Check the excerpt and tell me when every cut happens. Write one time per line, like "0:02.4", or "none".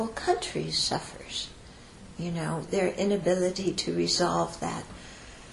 0:02.7